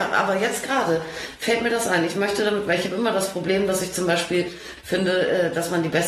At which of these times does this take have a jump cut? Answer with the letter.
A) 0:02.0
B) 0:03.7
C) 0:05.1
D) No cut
D